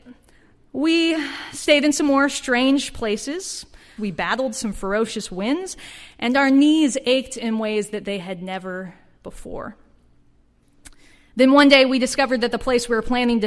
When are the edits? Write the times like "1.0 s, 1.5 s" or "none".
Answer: 4.0 s